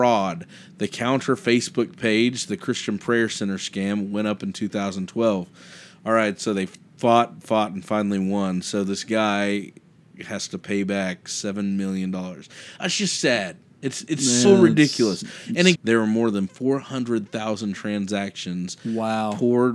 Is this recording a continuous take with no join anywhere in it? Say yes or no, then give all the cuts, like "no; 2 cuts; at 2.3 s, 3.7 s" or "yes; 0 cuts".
no; 2 cuts; at 14.4 s, 15.7 s